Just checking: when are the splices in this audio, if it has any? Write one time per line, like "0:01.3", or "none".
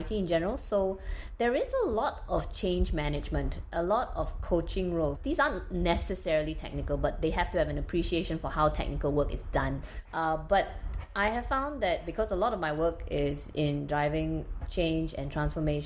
0:05.2
0:10.1
0:14.6